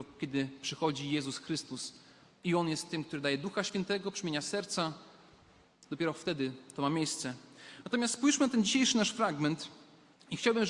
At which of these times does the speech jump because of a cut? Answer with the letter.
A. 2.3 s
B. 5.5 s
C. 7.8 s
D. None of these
D